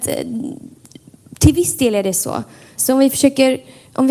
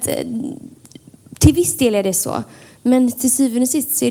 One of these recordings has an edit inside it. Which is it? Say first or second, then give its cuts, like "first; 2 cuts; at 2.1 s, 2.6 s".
first; 1 cut; at 2.8 s